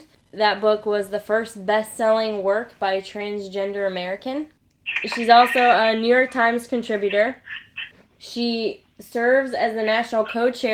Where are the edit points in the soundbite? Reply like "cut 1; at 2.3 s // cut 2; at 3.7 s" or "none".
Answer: cut 1; at 8.2 s